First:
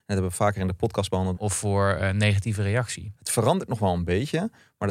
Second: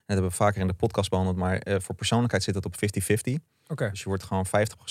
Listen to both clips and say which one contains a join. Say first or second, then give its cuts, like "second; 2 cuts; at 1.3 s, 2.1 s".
first; 2 cuts; at 1.4 s, 3.2 s